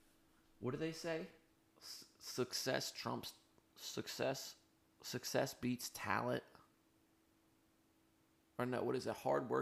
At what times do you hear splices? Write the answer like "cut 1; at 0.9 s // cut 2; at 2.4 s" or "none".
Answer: none